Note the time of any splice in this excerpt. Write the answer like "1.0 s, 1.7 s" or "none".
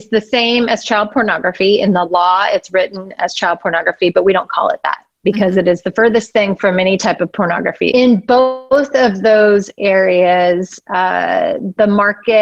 7.9 s